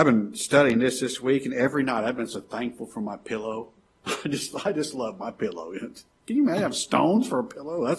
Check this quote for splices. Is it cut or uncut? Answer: uncut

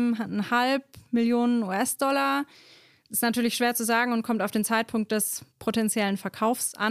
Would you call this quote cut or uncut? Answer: cut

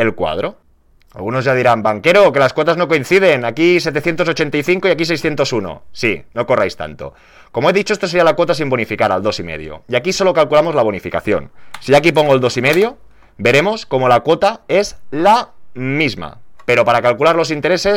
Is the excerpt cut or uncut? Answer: uncut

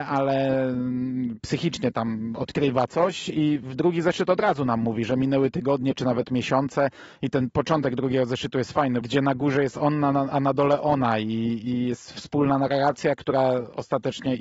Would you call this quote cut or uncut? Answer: cut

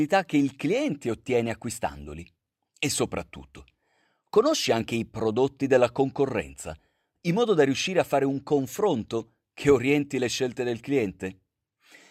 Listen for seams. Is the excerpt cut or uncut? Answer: uncut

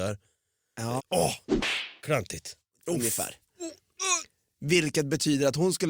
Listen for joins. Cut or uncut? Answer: cut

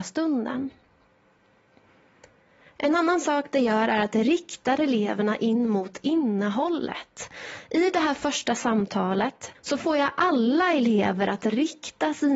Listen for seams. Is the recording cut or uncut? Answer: cut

